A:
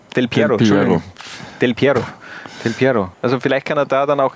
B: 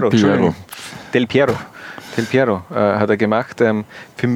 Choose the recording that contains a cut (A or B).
A